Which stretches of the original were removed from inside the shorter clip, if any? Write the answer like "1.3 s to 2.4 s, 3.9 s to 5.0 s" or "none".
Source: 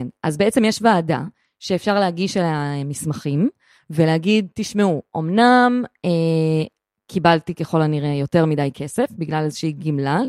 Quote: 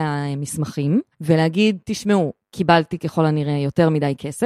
3.6 s to 3.8 s, 5.1 s to 7.0 s